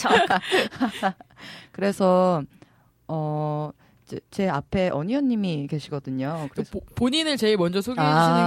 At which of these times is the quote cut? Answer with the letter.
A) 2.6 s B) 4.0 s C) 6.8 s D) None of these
D